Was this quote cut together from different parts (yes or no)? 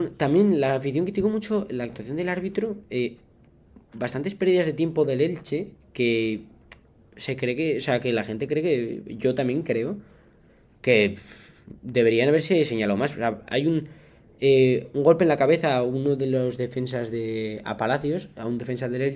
no